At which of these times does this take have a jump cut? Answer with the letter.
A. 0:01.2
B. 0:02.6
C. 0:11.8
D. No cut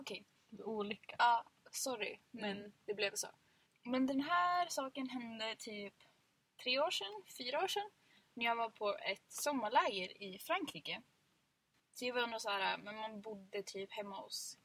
C